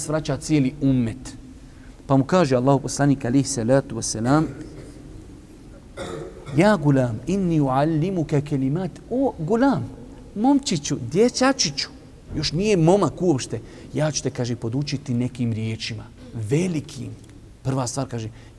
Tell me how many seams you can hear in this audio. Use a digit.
1